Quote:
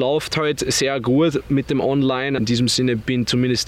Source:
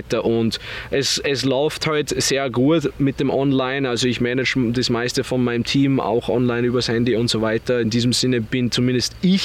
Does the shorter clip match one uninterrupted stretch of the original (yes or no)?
no